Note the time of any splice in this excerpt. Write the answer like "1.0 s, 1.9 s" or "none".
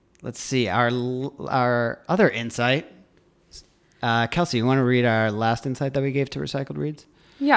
none